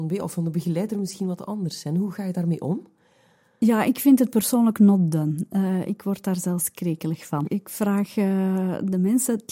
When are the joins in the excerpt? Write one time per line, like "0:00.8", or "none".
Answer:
none

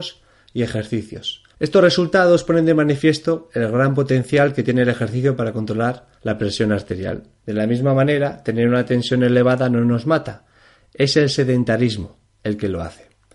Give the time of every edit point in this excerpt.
0:01.5
0:06.2
0:07.4

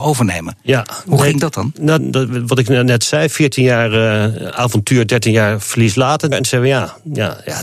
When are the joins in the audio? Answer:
0:02.0
0:06.3

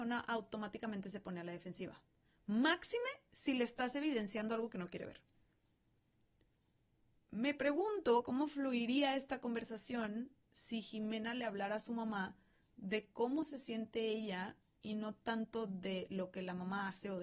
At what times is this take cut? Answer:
none

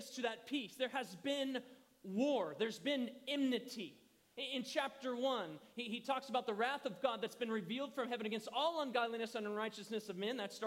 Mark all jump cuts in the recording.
none

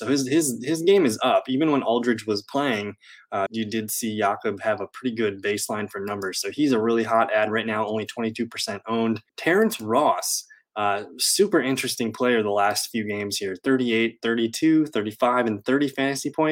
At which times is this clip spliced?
0:03.5
0:09.3

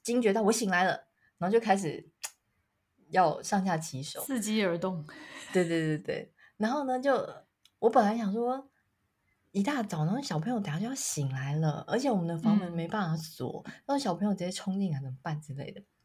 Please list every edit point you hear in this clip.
none

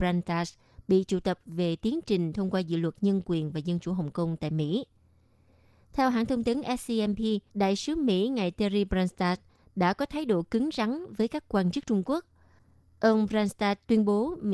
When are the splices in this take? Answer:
0:07.5

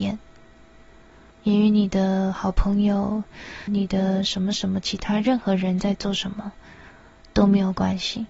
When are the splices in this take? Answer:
0:01.3
0:03.7

